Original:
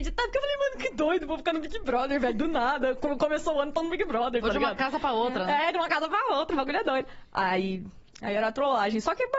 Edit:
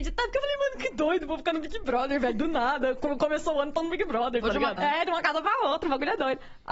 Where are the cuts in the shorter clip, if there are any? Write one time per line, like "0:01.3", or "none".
0:04.8